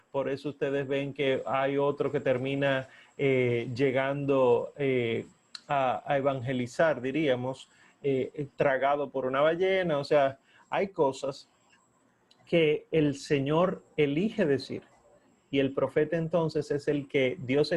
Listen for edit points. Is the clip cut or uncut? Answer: uncut